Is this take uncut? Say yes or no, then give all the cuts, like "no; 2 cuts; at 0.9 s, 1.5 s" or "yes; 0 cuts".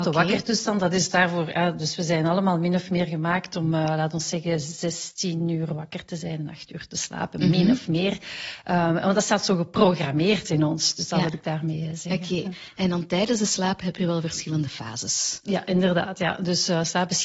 yes; 0 cuts